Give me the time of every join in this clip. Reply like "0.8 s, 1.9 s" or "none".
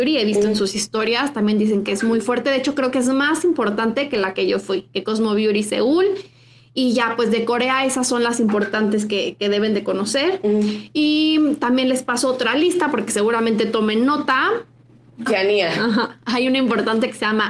15.3 s